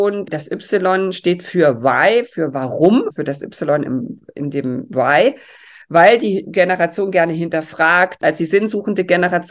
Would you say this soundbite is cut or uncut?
cut